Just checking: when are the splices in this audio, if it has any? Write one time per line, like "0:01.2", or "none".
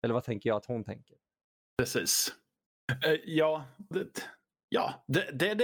0:03.9